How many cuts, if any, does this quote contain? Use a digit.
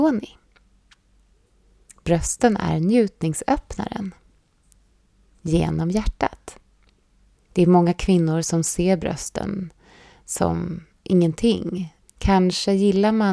2